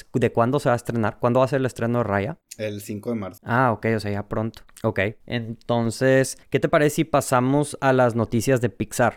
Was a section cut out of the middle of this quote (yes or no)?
no